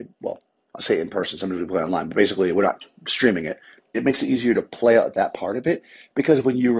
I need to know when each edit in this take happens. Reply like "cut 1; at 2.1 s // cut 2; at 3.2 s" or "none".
cut 1; at 3.9 s